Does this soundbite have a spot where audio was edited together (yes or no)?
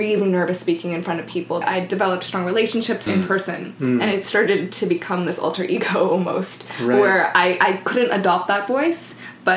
yes